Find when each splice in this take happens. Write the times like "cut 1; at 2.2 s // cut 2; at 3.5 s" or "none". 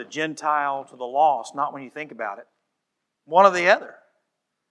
cut 1; at 3.2 s